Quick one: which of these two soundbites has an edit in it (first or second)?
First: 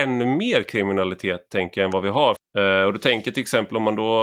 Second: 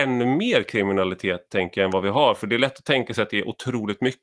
first